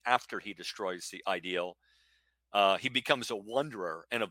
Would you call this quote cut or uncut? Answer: uncut